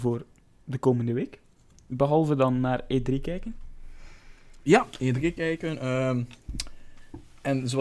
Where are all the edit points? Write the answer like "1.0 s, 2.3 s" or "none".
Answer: none